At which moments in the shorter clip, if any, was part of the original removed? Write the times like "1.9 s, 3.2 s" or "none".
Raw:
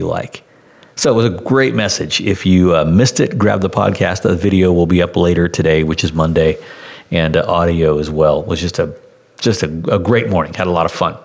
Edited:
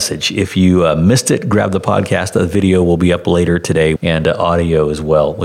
4.0 s